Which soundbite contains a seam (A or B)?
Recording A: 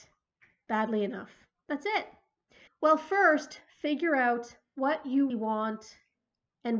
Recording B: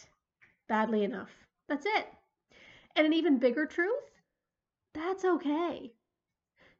A